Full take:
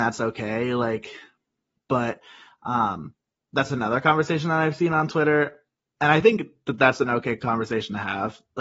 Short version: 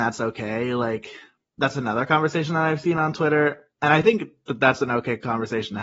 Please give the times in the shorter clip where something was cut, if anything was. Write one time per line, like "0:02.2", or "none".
0:01.4
0:03.7